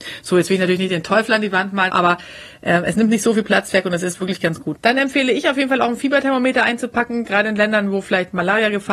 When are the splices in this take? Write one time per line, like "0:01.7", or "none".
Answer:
0:01.9
0:04.7